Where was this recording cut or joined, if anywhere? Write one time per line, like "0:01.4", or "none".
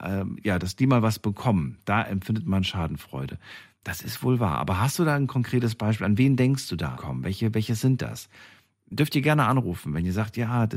0:07.0